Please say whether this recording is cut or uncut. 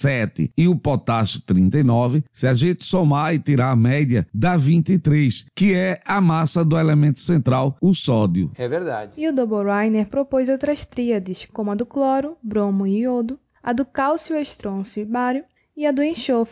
uncut